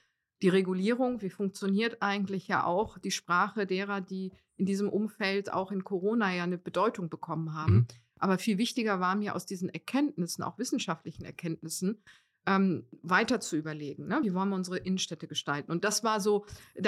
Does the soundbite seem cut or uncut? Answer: uncut